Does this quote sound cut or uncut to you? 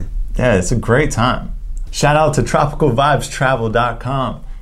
cut